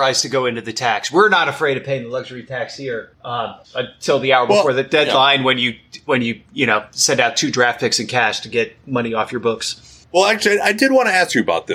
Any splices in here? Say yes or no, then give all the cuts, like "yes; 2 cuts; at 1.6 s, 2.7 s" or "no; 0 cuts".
no; 0 cuts